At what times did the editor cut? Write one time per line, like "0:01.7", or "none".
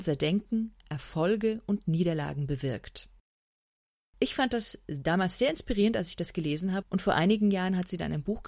0:06.8